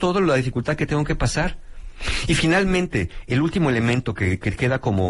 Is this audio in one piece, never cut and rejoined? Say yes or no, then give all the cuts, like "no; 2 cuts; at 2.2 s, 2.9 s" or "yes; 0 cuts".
yes; 0 cuts